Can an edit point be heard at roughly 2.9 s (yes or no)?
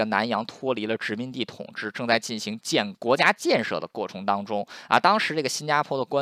yes